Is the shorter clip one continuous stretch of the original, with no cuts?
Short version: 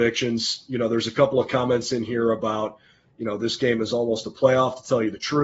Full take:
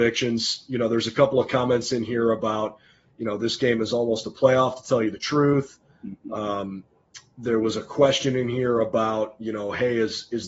yes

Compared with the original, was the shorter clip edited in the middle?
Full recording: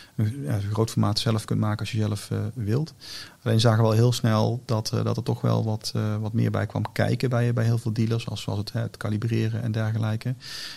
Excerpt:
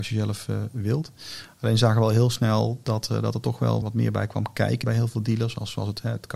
yes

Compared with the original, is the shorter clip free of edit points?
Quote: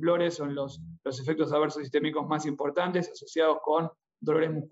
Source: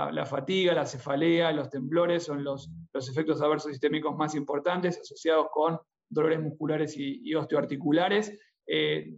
yes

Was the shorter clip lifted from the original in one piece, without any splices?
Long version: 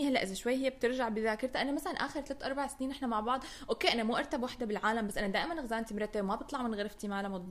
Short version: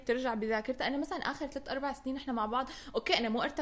yes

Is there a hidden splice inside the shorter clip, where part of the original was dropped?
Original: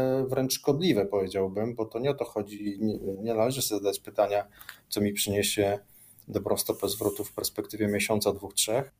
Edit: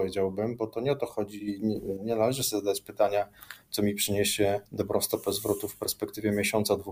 yes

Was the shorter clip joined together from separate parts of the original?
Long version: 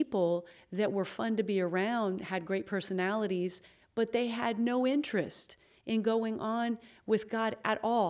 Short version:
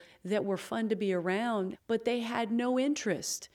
yes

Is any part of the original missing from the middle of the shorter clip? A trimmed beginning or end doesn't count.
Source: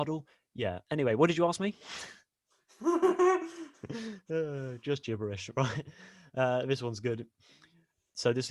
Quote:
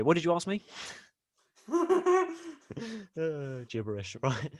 yes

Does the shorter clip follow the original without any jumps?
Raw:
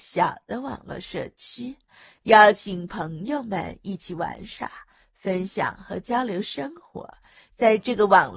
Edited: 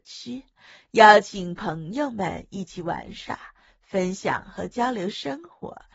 yes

